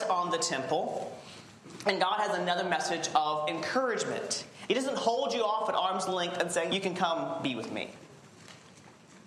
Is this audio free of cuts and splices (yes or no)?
no